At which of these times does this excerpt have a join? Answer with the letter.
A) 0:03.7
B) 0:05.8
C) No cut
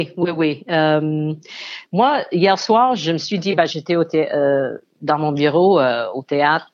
A